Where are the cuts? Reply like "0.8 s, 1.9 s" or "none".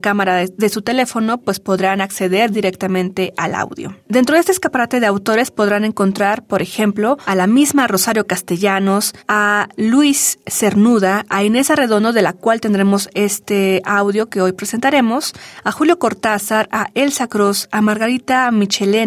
none